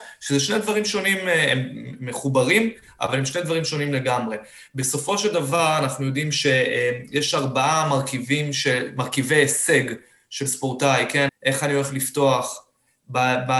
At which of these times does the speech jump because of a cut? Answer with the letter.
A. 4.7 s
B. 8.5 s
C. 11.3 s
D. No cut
C